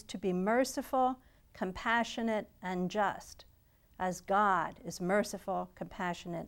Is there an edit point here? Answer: no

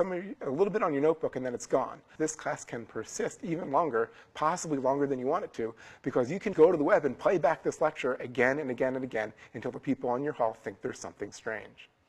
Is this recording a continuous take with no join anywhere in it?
no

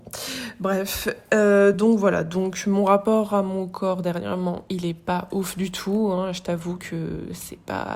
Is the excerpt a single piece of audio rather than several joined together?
yes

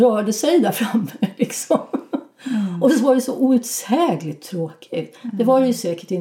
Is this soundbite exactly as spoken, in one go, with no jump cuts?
yes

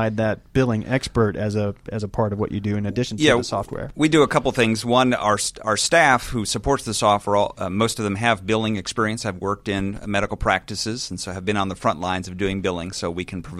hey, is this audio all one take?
yes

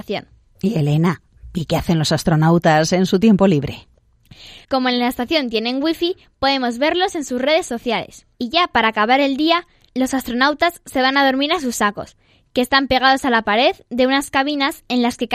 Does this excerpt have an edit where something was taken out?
yes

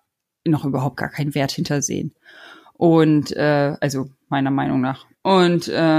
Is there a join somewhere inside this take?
no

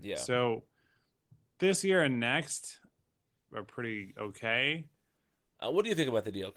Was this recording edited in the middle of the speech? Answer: yes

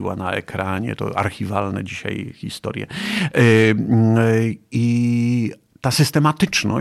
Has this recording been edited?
no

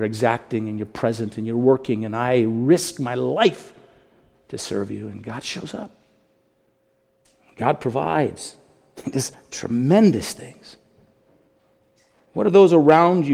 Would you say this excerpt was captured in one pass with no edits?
yes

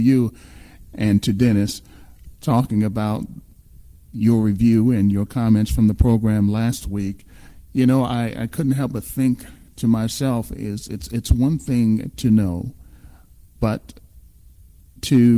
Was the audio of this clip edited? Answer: no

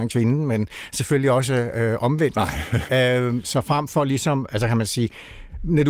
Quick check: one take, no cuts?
no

